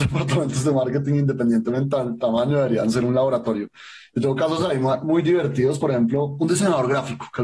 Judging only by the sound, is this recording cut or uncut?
uncut